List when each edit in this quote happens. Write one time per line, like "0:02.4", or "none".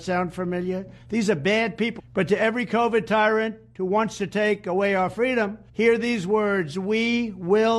0:02.0
0:05.7